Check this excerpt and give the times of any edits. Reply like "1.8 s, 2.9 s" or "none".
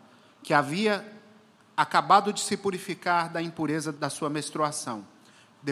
3.9 s